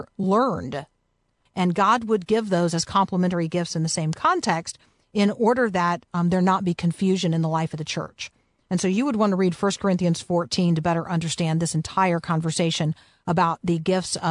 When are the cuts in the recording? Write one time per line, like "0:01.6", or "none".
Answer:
0:01.5